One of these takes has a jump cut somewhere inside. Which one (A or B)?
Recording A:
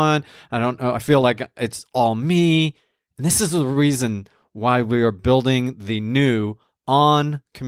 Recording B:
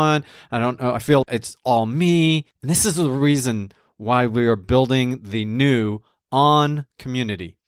B